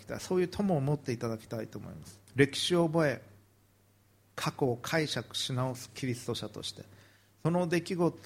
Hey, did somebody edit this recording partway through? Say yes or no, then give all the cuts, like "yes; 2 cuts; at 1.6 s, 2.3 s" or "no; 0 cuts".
yes; 1 cut; at 2.3 s